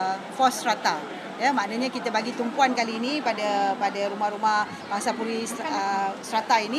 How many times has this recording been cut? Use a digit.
0